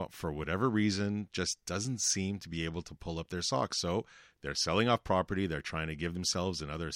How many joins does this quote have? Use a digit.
0